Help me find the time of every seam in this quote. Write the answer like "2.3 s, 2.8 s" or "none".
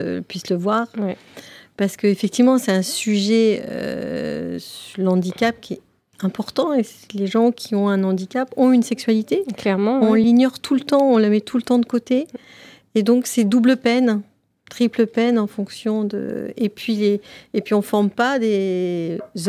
none